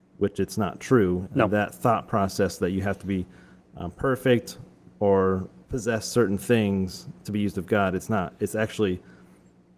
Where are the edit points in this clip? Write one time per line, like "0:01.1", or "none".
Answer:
0:01.3